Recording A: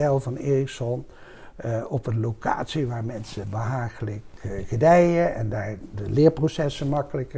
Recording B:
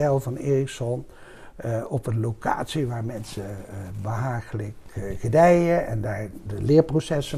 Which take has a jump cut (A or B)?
A